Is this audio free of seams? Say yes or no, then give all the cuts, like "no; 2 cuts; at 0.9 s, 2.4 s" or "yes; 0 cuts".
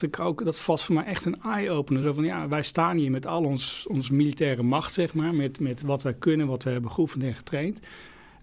yes; 0 cuts